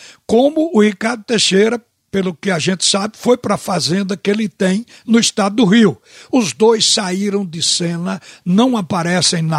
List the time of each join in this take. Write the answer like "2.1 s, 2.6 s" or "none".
none